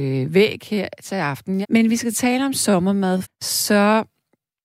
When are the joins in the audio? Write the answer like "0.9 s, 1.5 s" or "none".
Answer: 1.6 s, 3.2 s